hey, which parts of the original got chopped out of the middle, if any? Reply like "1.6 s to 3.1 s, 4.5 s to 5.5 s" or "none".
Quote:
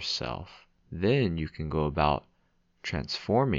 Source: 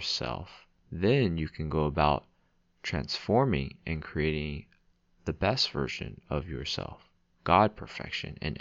none